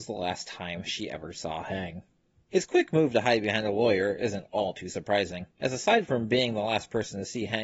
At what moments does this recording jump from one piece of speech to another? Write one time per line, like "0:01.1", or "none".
0:02.4
0:05.5